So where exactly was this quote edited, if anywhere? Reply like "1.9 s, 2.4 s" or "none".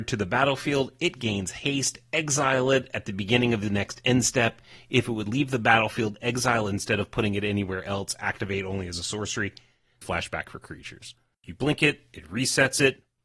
10.0 s, 11.3 s